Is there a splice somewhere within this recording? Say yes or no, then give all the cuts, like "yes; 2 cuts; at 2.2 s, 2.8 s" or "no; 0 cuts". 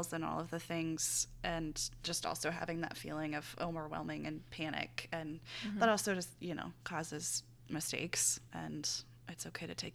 no; 0 cuts